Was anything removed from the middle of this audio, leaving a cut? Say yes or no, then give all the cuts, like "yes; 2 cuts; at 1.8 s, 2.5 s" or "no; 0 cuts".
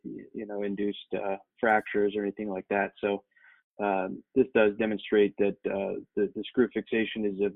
no; 0 cuts